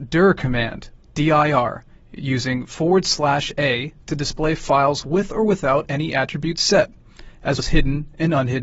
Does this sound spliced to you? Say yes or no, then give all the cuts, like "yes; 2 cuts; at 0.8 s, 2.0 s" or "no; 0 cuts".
yes; 1 cut; at 7.6 s